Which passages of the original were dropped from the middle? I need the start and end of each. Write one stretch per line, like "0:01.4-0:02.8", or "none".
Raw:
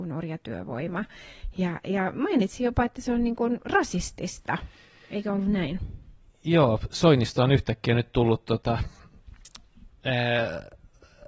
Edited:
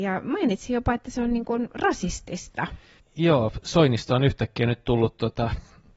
0:04.9-0:06.3